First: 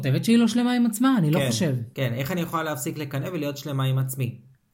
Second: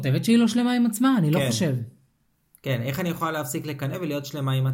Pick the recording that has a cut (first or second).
first